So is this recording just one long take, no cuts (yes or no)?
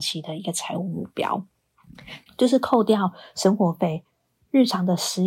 no